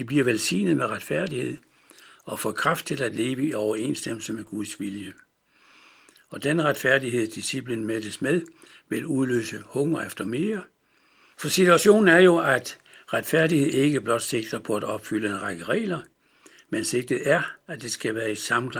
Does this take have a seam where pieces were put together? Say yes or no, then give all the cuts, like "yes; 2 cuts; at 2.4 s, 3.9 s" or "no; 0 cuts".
yes; 1 cut; at 11.3 s